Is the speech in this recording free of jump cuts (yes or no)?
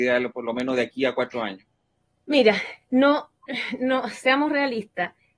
yes